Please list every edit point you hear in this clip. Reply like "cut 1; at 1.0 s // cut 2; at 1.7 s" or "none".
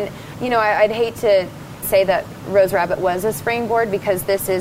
cut 1; at 1.8 s